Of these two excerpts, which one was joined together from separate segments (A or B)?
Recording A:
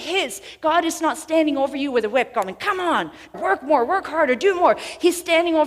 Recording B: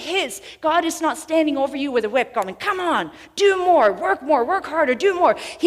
A